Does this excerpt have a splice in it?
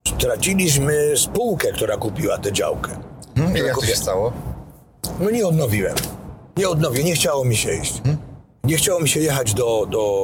no; 0 cuts

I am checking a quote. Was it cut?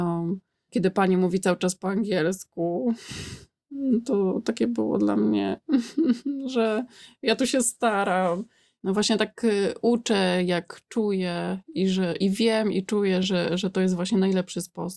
no; 0 cuts

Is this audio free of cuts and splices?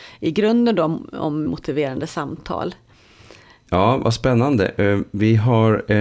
no; 2 cuts; at 1.4 s, 3.7 s

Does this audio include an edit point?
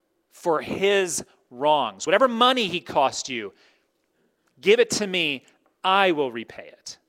no; 0 cuts

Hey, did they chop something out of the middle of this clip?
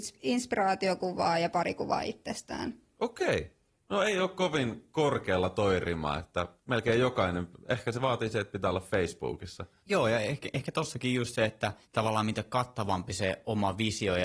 no; 0 cuts

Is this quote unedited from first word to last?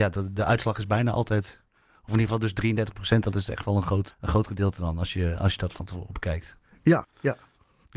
no; 2 cuts; at 4.1 s, 7.0 s

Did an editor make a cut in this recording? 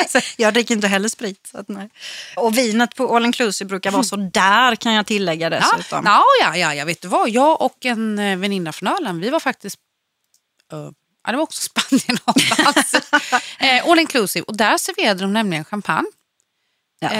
yes; 1 cut; at 2.4 s

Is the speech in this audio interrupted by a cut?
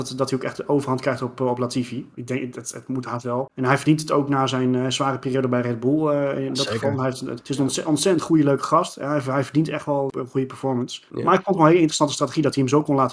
no; 0 cuts

